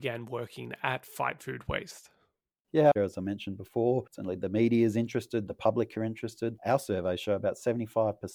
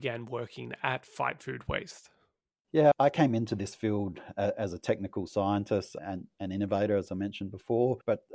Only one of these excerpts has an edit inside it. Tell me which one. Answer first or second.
first